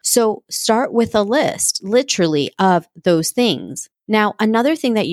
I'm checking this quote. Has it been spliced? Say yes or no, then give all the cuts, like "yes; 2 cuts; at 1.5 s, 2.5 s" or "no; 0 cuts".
no; 0 cuts